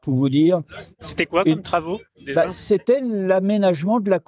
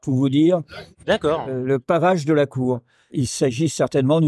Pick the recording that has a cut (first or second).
second